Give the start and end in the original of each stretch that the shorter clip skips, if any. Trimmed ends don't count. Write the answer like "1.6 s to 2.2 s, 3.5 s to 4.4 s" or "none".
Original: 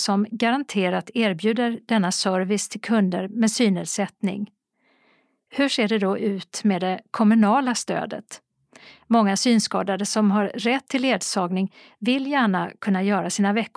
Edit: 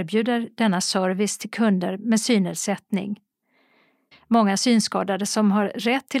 5.4 s to 8.9 s